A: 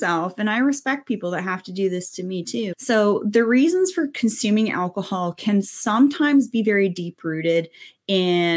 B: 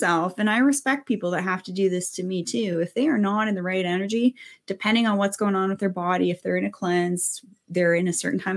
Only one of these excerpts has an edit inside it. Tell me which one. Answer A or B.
A